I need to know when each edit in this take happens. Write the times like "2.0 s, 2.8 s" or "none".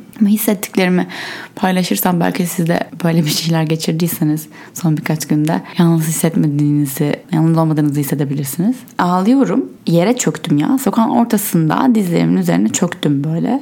none